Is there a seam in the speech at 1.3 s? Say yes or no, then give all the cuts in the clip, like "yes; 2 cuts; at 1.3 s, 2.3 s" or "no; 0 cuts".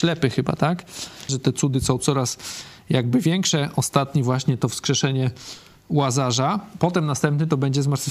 yes; 1 cut; at 1.3 s